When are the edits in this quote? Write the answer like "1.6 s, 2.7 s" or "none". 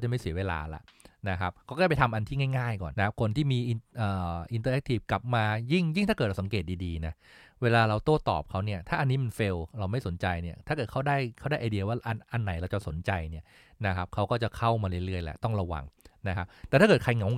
2.9 s